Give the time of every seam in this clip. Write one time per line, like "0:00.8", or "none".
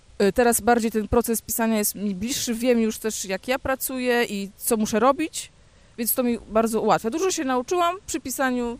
none